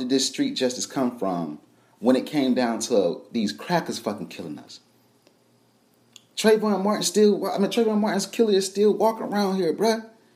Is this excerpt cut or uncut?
uncut